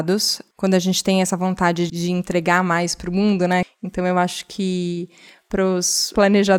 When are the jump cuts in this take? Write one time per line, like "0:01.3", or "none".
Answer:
0:01.9
0:03.6